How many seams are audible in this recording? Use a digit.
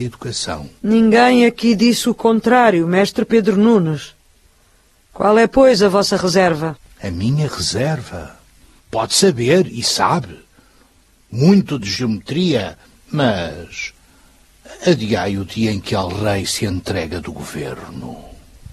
1